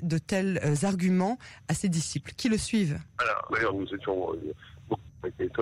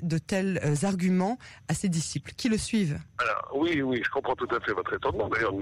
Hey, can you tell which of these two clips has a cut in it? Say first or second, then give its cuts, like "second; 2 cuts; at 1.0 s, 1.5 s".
first; 1 cut; at 3.5 s